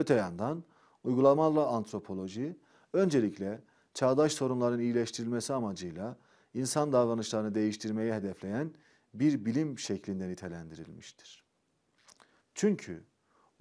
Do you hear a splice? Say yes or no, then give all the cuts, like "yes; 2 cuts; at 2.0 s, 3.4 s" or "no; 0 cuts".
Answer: yes; 1 cut; at 12.4 s